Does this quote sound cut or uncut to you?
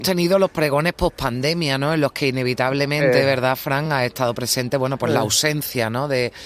uncut